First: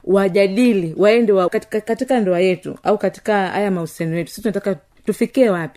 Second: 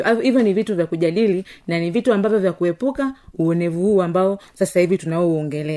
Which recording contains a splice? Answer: first; 1 cut; at 1.5 s

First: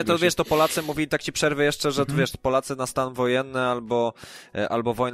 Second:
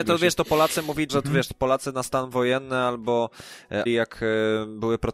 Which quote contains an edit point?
second; 2 cuts; at 1.1 s, 3.9 s

